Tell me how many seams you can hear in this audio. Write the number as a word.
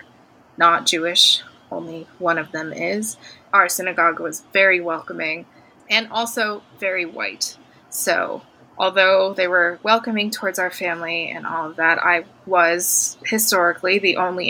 one